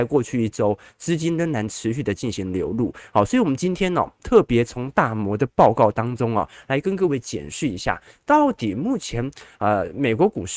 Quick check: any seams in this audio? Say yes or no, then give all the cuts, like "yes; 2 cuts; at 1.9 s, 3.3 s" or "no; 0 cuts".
no; 0 cuts